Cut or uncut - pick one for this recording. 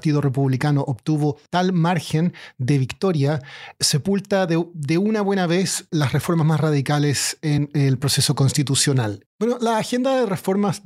cut